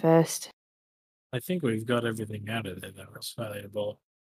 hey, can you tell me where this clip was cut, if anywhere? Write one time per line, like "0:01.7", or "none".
none